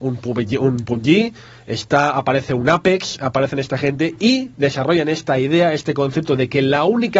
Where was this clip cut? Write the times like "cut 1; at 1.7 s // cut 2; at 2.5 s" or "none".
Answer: cut 1; at 4.5 s

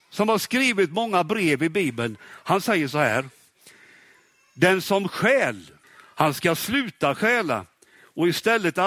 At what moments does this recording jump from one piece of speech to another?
cut 1; at 5.8 s

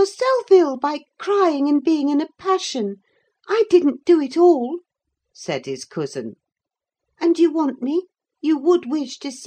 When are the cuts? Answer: cut 1; at 7.0 s

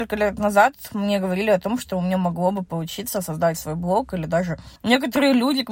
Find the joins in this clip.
cut 1; at 4.8 s

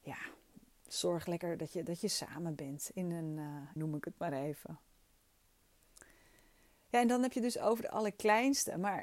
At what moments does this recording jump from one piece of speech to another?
cut 1; at 3.8 s

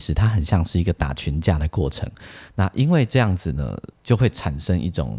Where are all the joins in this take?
cut 1; at 2.5 s // cut 2; at 3.9 s

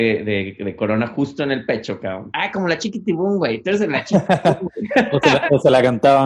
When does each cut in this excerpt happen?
cut 1; at 2.3 s

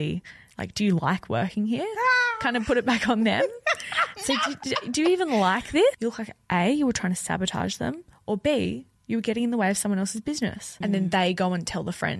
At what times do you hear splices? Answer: cut 1; at 5.9 s // cut 2; at 10.8 s

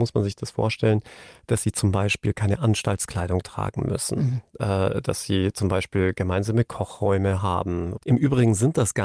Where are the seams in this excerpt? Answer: cut 1; at 8.0 s

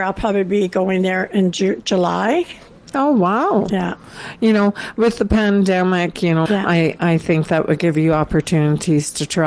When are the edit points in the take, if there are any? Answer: cut 1; at 2.9 s // cut 2; at 6.5 s

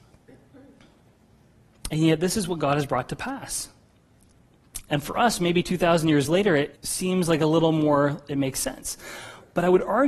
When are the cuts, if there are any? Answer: cut 1; at 4.9 s // cut 2; at 6.7 s

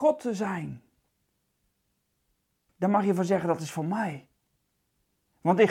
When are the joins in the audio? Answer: cut 1; at 2.7 s

